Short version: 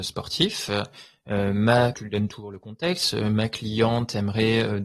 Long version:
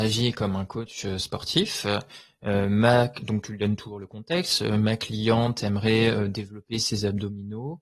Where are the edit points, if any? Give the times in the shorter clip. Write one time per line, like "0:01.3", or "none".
0:01.9